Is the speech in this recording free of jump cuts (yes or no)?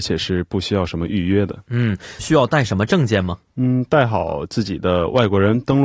no